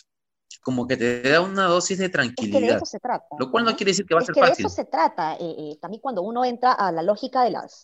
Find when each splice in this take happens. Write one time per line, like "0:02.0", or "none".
none